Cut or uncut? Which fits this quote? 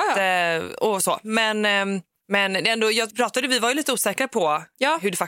cut